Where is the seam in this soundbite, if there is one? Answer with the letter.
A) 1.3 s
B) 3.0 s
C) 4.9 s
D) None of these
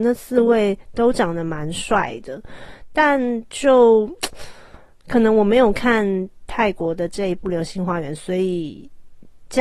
D